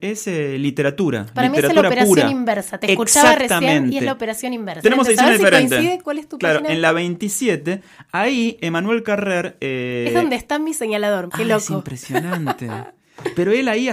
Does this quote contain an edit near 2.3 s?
no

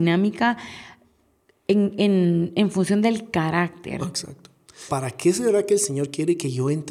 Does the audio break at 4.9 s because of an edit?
yes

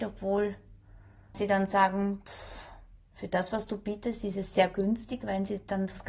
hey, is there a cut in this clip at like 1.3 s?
yes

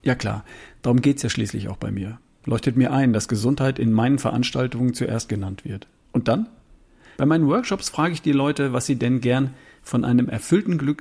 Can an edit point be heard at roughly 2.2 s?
no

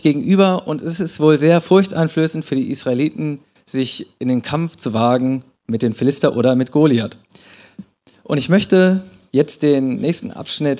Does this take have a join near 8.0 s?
no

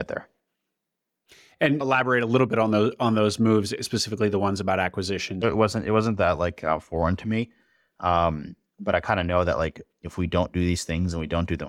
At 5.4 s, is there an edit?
yes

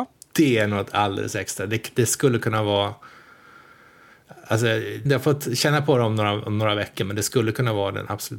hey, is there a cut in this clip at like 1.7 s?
no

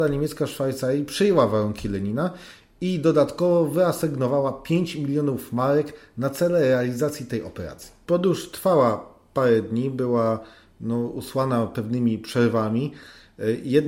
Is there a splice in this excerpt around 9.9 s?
no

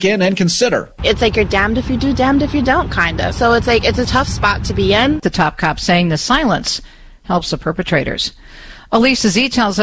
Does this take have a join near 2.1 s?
no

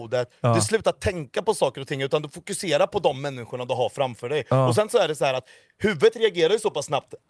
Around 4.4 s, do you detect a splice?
no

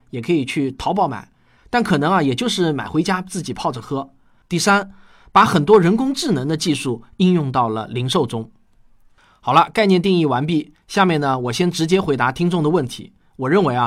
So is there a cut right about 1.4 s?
no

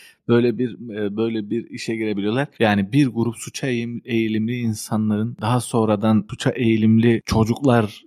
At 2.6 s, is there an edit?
yes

